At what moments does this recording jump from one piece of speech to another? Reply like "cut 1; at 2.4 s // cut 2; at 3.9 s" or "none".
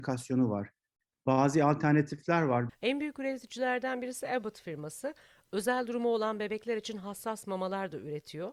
cut 1; at 2.7 s